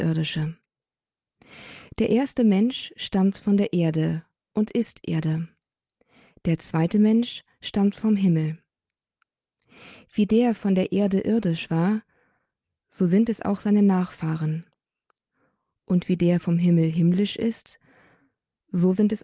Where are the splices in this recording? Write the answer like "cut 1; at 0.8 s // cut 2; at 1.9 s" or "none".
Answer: none